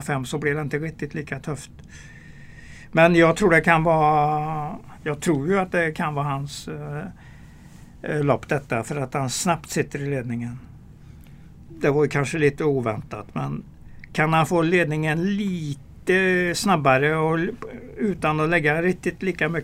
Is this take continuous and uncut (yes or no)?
no